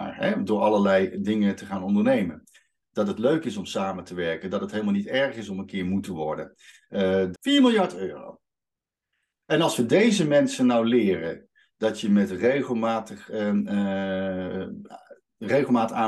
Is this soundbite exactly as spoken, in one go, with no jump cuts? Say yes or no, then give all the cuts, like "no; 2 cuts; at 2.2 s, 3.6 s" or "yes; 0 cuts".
no; 1 cut; at 7.3 s